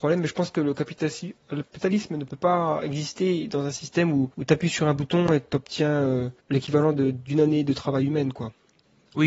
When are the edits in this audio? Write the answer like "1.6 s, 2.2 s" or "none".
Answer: 4.3 s, 6.4 s